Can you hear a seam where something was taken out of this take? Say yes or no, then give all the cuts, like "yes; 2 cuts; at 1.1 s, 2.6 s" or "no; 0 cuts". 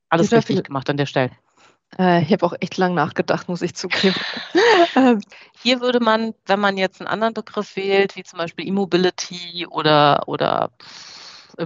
no; 0 cuts